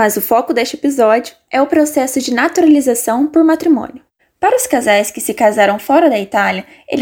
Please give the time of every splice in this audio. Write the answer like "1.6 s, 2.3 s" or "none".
4.2 s